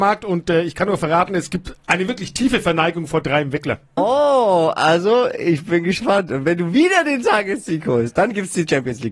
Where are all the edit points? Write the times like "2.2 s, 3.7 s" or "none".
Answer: 4.0 s